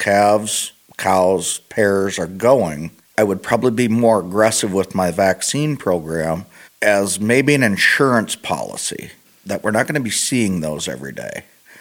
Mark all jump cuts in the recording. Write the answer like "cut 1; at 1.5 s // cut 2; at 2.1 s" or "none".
none